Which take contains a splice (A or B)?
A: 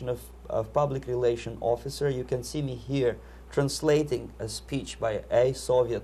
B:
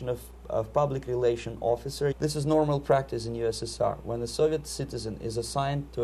B